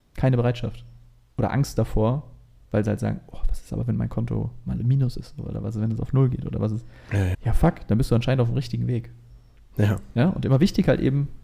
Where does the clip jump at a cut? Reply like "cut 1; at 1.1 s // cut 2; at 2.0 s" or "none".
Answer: cut 1; at 7.3 s

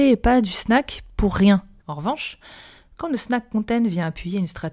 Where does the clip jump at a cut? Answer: cut 1; at 1.8 s

